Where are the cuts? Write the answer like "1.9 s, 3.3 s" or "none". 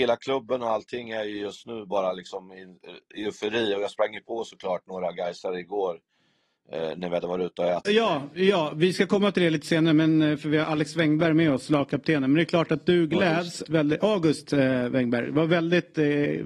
7.8 s, 13.6 s

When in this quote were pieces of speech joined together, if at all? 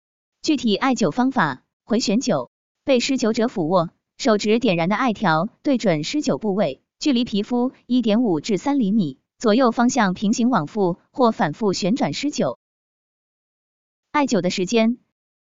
1.7 s, 4.1 s

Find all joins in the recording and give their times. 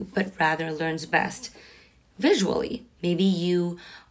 3.0 s

